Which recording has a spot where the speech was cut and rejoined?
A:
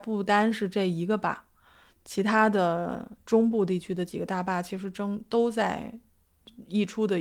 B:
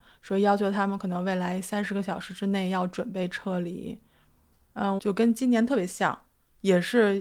B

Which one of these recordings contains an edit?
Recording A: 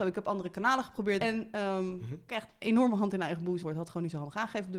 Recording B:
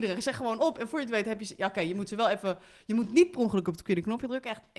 A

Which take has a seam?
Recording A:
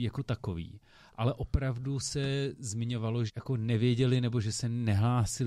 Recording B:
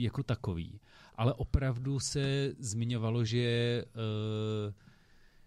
A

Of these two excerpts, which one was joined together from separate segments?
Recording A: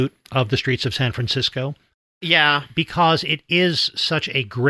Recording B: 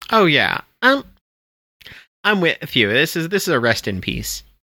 A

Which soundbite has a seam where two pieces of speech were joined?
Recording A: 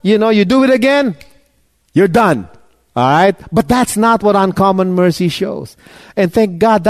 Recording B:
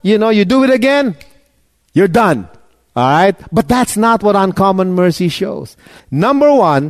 B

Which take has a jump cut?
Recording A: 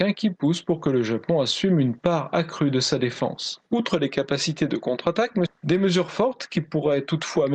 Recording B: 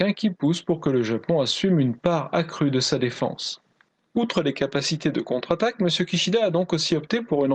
A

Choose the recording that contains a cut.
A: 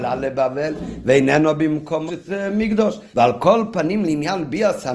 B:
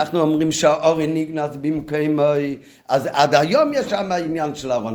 A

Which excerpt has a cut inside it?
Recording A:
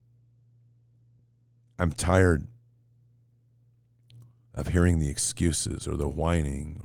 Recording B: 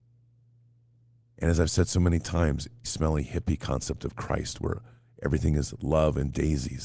B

